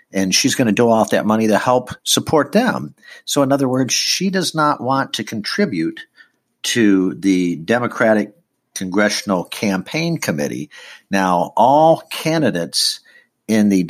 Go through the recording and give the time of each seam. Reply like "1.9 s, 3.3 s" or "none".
none